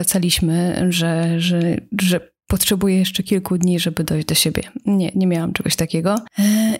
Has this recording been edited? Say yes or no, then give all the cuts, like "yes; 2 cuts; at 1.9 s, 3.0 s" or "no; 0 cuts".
no; 0 cuts